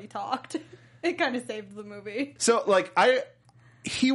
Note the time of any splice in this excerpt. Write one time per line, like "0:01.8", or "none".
0:02.4